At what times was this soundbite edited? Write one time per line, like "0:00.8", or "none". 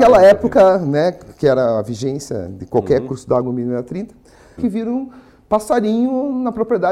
0:04.6